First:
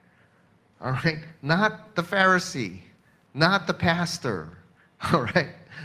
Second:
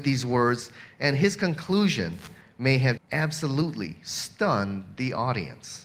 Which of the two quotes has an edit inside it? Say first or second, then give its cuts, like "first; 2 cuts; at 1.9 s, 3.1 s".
second; 1 cut; at 3.0 s